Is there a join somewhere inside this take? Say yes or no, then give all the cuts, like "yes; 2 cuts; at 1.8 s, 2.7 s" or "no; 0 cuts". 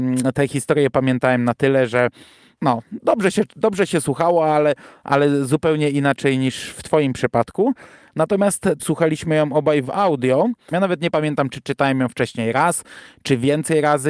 yes; 2 cuts; at 8.8 s, 10.7 s